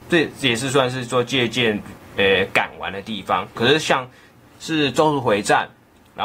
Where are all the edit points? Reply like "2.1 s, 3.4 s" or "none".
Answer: 2.0 s, 3.6 s